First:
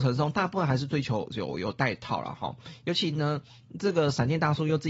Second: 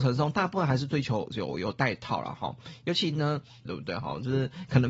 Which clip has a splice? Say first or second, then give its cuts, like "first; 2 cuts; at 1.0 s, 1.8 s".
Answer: second; 1 cut; at 3.7 s